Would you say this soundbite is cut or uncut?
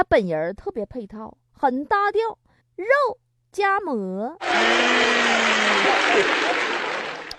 cut